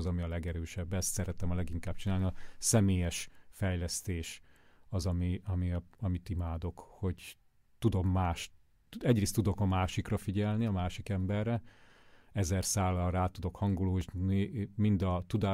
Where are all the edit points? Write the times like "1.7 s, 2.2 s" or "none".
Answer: none